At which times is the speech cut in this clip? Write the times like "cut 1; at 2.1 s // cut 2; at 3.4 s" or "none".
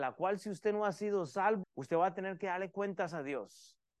cut 1; at 1.6 s